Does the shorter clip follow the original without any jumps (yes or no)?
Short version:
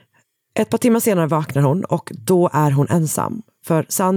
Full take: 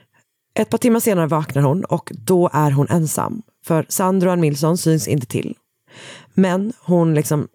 yes